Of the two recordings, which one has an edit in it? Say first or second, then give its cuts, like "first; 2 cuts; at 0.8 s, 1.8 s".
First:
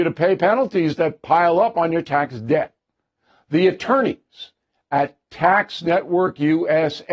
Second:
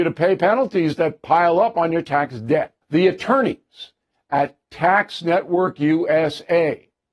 second; 1 cut; at 2.8 s